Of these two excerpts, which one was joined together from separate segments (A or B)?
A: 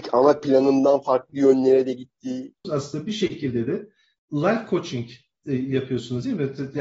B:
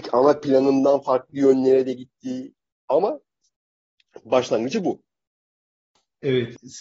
A